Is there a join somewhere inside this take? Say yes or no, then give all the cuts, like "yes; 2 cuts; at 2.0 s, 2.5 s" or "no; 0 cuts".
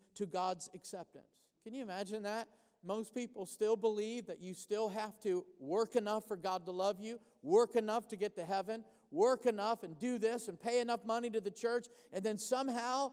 yes; 2 cuts; at 1.5 s, 12.1 s